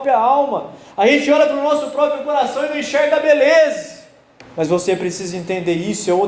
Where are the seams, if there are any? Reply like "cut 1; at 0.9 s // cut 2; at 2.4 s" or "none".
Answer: cut 1; at 4.4 s